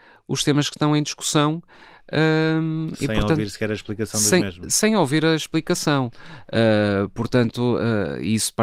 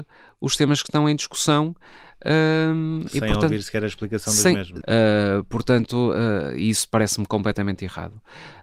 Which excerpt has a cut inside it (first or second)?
second